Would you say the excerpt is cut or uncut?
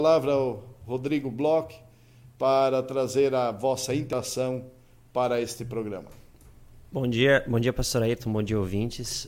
uncut